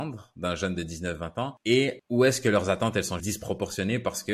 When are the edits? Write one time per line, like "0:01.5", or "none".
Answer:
0:03.2